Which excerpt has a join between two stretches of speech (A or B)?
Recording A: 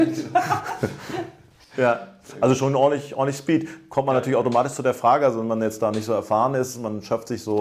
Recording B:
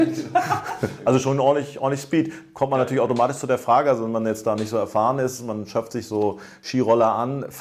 B